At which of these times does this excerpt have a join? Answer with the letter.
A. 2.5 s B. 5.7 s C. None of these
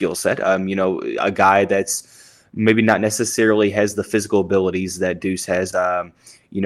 B